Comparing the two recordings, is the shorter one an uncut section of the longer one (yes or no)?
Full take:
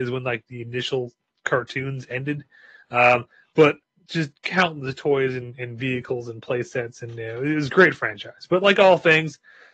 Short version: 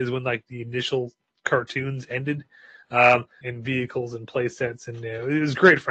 no